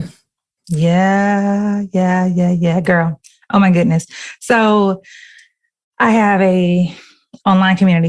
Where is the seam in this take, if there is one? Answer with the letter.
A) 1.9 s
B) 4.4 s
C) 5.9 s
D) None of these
D